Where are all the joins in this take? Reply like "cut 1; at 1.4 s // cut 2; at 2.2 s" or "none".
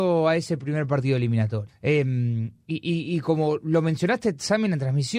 cut 1; at 1.7 s